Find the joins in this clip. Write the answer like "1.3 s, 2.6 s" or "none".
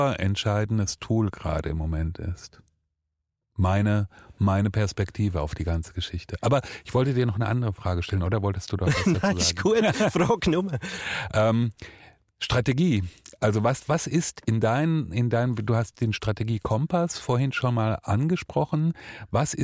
none